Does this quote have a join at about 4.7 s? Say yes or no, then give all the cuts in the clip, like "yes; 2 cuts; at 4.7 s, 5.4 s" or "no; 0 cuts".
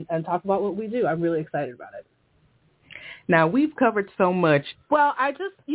yes; 1 cut; at 4.7 s